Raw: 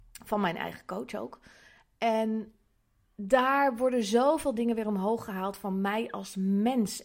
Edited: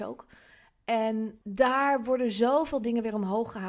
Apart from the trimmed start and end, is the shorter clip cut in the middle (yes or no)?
yes